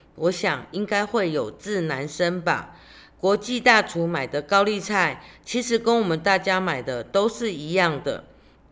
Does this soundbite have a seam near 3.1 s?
no; 0 cuts

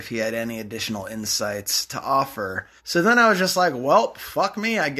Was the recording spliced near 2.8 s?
yes; 1 cut; at 2.8 s

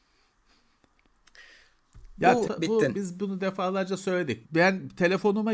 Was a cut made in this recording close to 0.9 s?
no; 2 cuts; at 2.4 s, 4.4 s

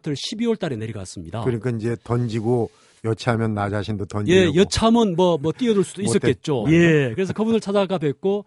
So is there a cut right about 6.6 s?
yes; 1 cut; at 6.6 s

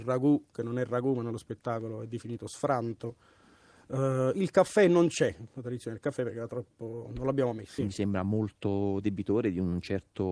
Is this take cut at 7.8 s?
yes; 1 cut; at 7.8 s

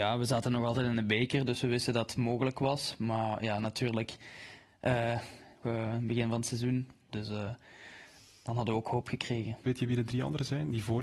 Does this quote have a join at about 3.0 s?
no; 3 cuts; at 5.6 s, 7.1 s, 9.6 s

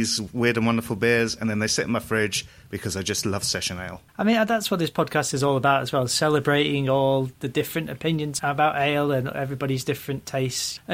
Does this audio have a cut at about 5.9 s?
no; 1 cut; at 4.1 s

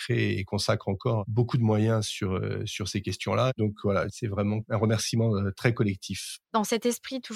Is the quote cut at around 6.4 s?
yes; 1 cut; at 6.4 s

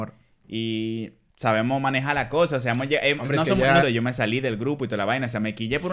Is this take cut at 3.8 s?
yes; 1 cut; at 3.8 s

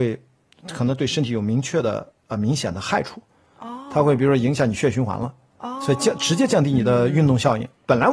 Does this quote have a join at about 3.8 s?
no; 0 cuts

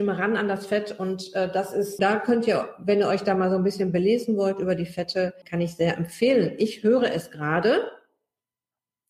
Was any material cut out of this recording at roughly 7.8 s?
no; 2 cuts; at 2.0 s, 5.4 s

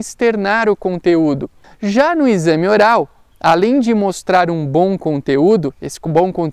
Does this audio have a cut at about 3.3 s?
no; 1 cut; at 1.6 s

